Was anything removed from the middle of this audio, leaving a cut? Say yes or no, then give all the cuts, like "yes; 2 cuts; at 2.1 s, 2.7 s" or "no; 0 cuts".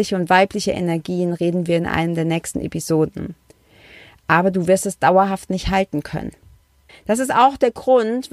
yes; 1 cut; at 6.9 s